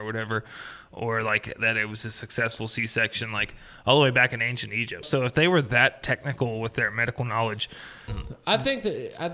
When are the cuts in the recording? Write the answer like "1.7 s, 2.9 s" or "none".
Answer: 5.0 s, 8.1 s